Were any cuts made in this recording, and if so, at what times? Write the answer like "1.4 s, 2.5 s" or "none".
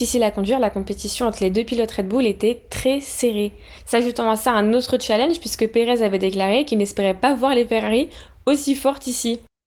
none